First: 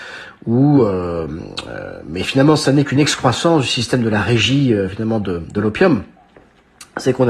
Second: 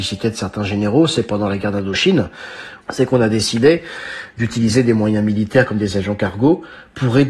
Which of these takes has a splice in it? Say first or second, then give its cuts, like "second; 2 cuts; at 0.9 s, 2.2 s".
second; 1 cut; at 2.8 s